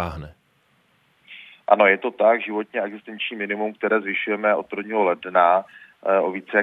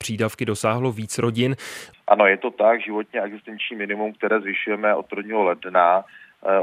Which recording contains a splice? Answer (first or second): second